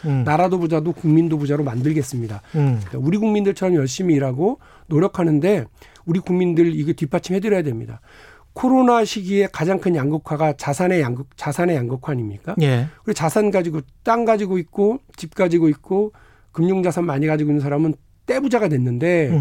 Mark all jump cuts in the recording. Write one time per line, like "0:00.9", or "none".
0:02.9

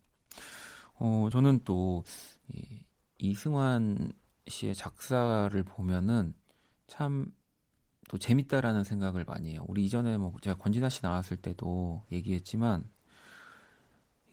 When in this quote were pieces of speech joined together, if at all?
none

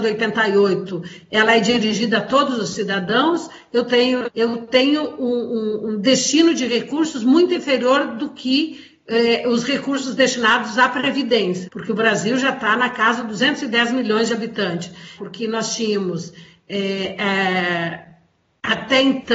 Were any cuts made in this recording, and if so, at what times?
0:04.2
0:11.6
0:15.2

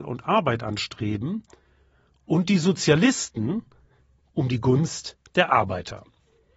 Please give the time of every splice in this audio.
0:04.2

